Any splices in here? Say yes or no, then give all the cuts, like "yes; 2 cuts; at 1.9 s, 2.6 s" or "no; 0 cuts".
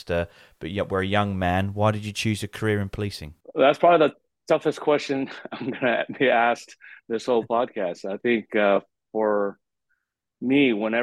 no; 0 cuts